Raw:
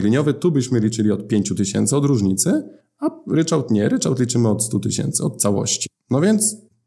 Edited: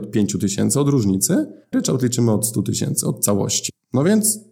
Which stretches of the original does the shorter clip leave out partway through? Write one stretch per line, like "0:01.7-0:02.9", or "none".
0:02.9-0:03.9